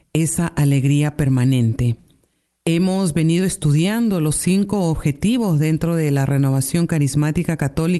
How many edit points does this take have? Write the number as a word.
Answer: zero